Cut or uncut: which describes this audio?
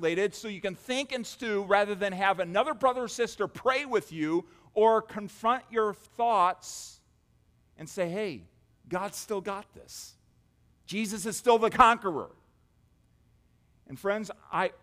cut